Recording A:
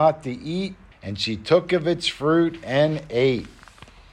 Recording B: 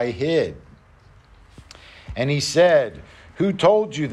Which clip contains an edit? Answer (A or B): A